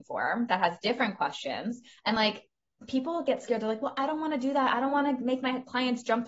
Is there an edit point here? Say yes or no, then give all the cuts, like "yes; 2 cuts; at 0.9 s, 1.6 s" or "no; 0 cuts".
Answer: no; 0 cuts